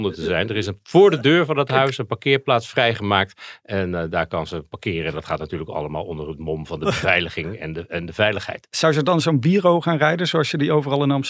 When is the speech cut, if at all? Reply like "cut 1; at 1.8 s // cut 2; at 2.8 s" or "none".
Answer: none